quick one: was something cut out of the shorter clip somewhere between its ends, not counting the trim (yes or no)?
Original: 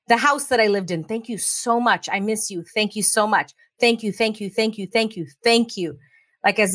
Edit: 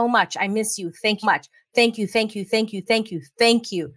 yes